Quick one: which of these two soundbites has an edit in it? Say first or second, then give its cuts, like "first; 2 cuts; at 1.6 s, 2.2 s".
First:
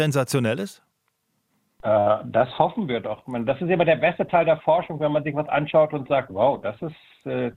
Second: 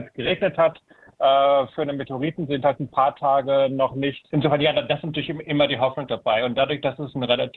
second; 1 cut; at 4.3 s